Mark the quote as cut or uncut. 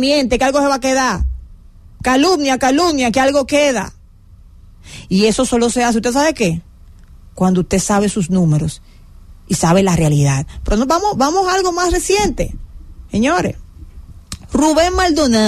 uncut